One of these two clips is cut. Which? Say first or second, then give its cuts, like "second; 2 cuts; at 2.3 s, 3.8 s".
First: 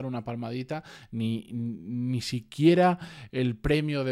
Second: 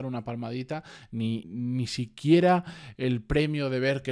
second; 1 cut; at 1.4 s